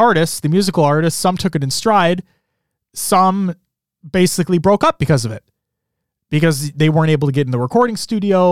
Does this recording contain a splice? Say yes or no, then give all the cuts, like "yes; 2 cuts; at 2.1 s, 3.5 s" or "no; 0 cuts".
no; 0 cuts